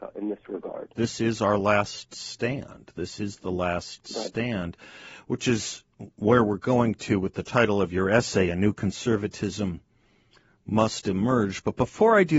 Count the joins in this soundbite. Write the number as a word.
one